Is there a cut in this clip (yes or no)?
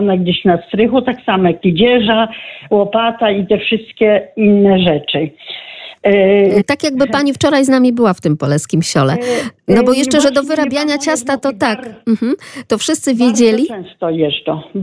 yes